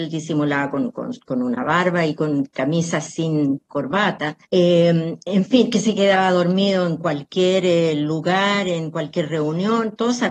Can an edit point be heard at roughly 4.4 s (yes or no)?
yes